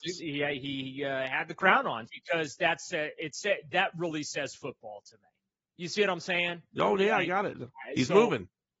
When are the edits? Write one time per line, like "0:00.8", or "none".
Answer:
0:02.1